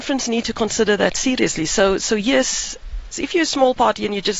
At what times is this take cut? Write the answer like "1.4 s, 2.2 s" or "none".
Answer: 3.1 s